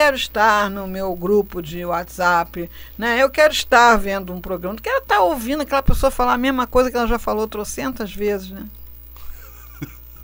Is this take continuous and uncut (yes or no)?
yes